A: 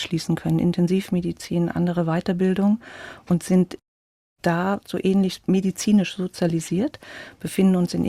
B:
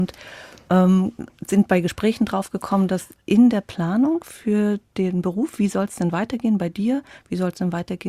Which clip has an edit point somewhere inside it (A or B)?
A